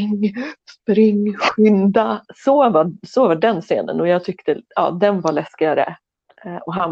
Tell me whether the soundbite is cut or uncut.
uncut